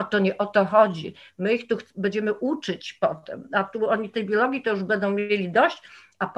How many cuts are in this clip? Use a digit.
0